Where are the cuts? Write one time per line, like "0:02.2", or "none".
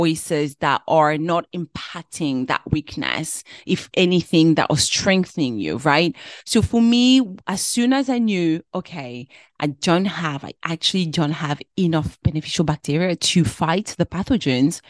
none